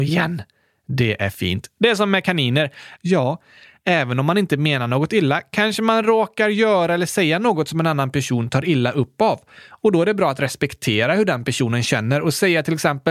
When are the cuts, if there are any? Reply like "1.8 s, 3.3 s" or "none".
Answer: 3.0 s